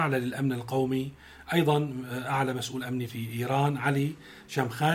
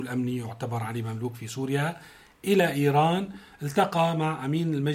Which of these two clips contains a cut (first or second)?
first